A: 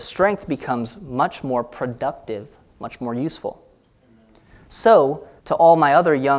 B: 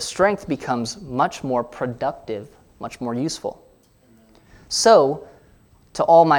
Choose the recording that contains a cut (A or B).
A